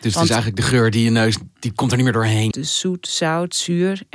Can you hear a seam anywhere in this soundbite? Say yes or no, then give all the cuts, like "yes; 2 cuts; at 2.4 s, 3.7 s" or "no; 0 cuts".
yes; 1 cut; at 2.5 s